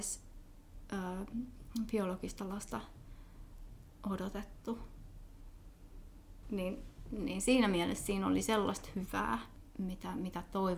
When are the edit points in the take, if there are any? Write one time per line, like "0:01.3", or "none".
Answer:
0:06.4